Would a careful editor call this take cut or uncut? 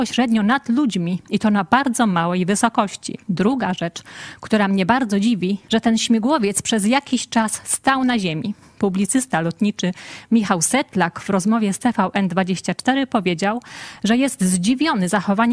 cut